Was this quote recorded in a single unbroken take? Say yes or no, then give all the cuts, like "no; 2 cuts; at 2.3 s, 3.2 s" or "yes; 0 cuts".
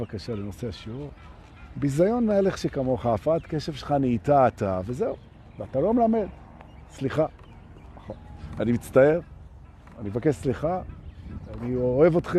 yes; 0 cuts